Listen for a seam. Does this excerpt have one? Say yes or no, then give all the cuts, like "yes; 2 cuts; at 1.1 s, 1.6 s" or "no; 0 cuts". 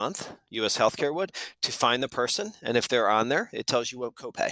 no; 0 cuts